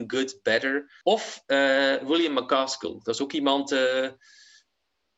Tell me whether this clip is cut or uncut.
cut